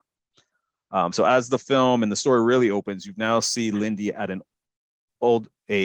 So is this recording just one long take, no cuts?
yes; 0 cuts

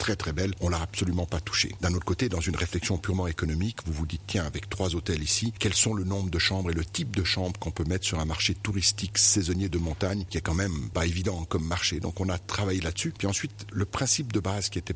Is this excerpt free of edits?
yes; 0 cuts

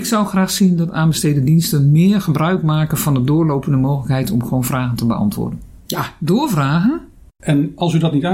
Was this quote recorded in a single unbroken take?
no; 2 cuts; at 5.8 s, 7.3 s

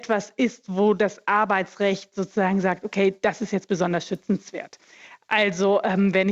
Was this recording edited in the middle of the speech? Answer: no; 0 cuts

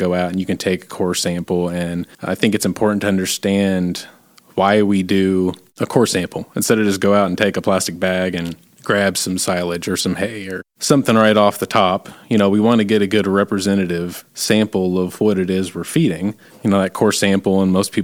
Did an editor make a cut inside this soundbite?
yes; 1 cut; at 2.1 s

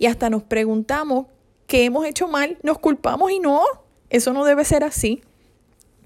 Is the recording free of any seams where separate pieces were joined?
yes; 0 cuts

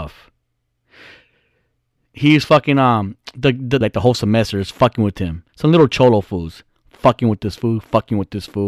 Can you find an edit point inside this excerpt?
yes; 2 cuts; at 3.8 s, 5.5 s

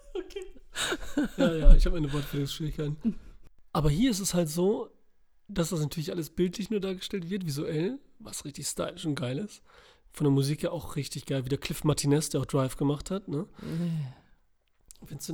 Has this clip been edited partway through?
no; 0 cuts

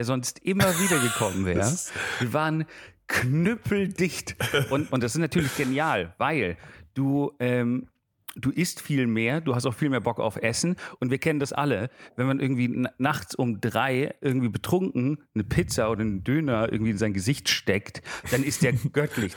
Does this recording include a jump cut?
yes; 1 cut; at 4.9 s

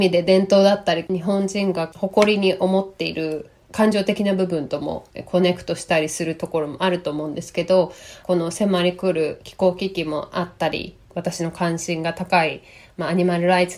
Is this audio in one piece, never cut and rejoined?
yes; 0 cuts

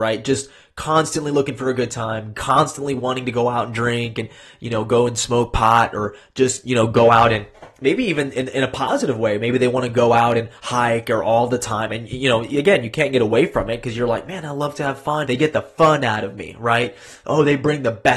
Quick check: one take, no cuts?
no; 2 cuts; at 11.9 s, 15.3 s

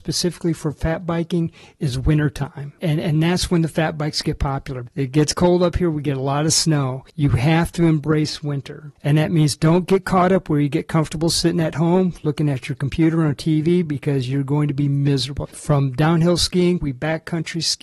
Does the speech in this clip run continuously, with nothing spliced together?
no; 2 cuts; at 15.4 s, 16.8 s

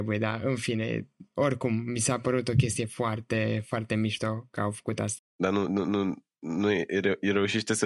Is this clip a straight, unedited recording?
no; 1 cut; at 5.2 s

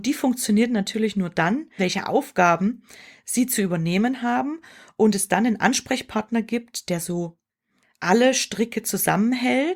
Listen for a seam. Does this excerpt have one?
yes; 1 cut; at 1.8 s

